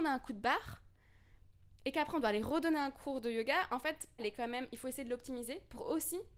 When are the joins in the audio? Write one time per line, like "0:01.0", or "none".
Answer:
0:04.2